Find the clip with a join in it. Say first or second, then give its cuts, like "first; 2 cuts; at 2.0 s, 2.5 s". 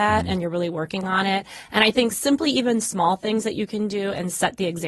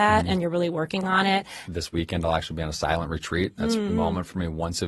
second; 2 cuts; at 1.6 s, 3.9 s